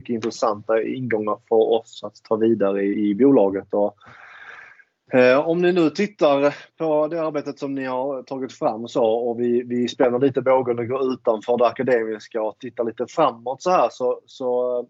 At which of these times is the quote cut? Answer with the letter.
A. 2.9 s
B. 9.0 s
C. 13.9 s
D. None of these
A